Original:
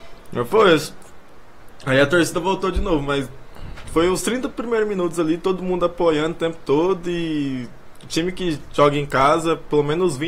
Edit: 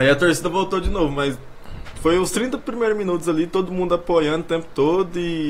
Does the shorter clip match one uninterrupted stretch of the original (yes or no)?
yes